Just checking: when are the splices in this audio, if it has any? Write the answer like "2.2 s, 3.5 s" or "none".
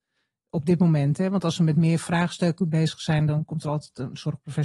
none